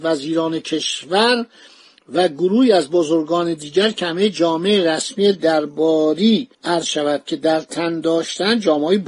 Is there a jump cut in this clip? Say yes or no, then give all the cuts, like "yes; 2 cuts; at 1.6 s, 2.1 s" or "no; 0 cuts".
yes; 1 cut; at 6.5 s